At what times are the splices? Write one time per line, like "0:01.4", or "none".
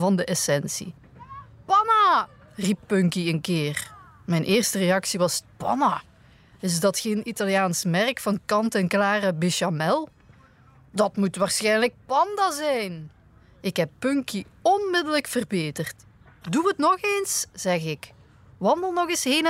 0:05.4
0:16.4